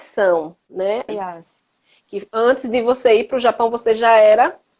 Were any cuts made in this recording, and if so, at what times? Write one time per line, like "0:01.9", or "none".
0:01.1